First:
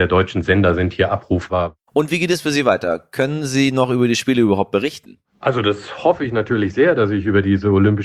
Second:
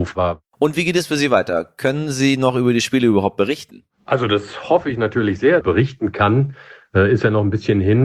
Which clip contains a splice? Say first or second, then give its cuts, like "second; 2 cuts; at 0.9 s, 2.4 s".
second; 1 cut; at 5.6 s